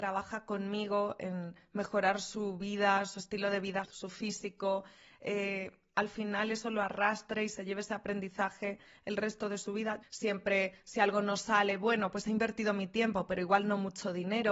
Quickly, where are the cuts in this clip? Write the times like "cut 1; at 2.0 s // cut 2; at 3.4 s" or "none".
cut 1; at 3.8 s // cut 2; at 10.0 s